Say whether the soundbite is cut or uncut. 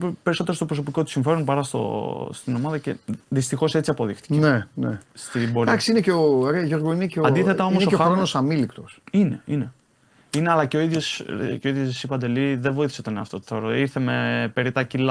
uncut